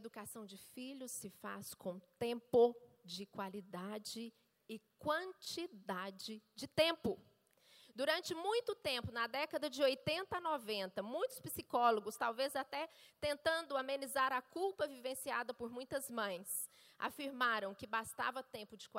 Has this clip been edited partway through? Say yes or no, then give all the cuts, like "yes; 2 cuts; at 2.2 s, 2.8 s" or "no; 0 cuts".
no; 0 cuts